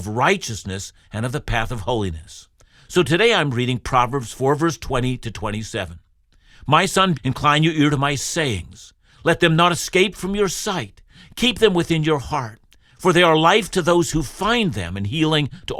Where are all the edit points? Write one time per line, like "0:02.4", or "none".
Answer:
0:07.1